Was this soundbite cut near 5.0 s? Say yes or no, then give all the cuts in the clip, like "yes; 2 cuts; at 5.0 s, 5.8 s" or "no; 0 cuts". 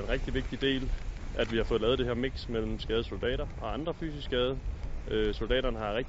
no; 0 cuts